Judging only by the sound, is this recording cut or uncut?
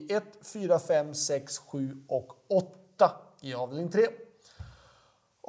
uncut